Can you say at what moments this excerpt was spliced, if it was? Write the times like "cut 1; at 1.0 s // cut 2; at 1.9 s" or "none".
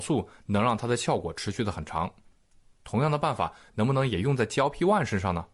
none